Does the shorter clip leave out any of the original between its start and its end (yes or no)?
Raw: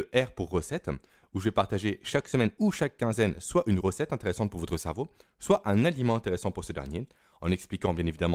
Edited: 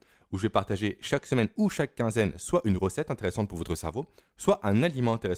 no